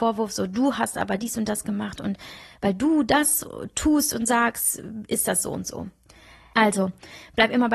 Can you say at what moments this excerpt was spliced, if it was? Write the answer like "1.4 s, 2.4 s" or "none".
6.5 s